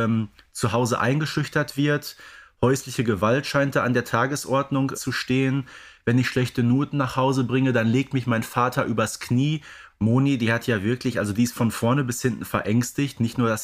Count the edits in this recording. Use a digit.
2